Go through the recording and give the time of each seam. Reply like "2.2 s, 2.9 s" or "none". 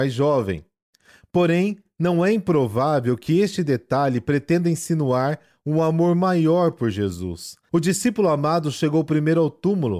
7.7 s

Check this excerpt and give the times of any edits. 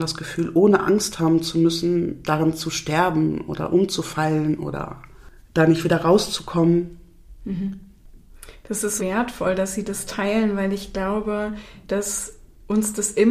9.0 s

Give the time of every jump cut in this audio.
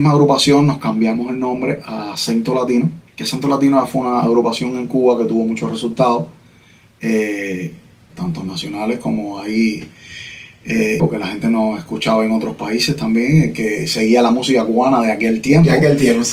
3.1 s, 8.1 s, 11.0 s

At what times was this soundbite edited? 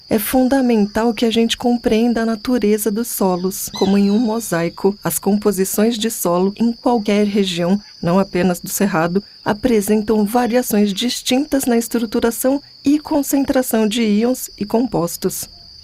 3.7 s

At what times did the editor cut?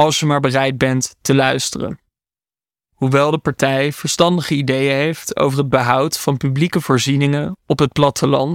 2.8 s

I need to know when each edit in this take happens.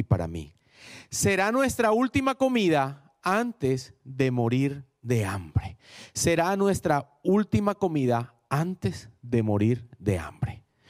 none

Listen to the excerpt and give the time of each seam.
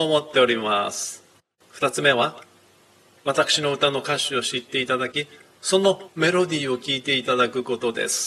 none

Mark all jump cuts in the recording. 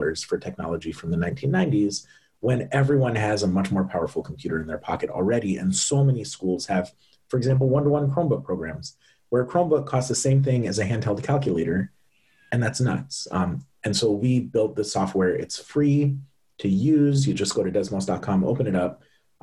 none

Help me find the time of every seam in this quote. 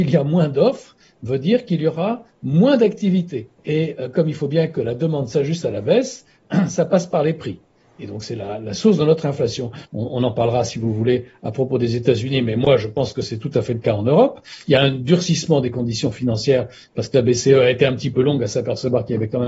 3.6 s, 9.8 s

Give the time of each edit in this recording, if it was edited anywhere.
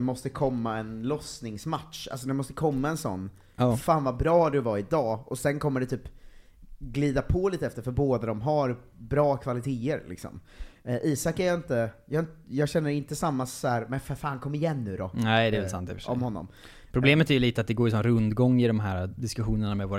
none

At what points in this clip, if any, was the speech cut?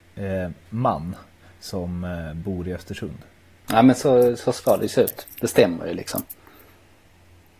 3.6 s

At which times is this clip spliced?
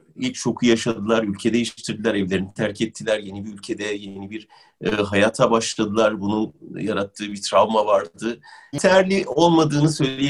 8.7 s

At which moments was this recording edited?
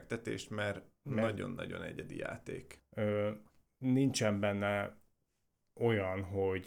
2.8 s

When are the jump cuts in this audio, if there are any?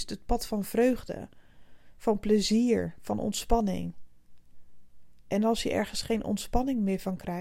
none

